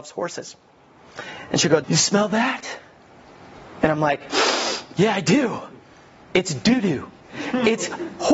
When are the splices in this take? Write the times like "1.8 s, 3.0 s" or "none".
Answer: 1.8 s